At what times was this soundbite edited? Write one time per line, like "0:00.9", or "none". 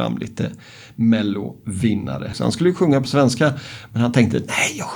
0:02.3